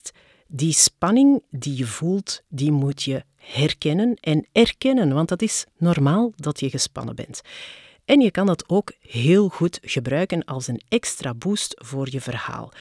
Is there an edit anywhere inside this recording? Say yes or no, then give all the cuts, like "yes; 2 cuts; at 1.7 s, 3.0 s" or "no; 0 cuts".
no; 0 cuts